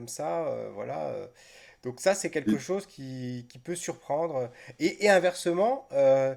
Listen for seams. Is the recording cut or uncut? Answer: uncut